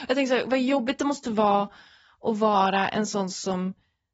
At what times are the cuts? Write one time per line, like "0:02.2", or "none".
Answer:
none